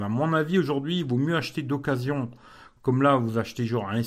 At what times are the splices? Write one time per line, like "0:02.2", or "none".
none